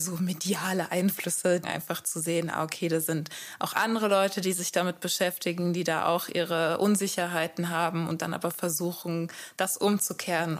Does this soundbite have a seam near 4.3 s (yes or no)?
no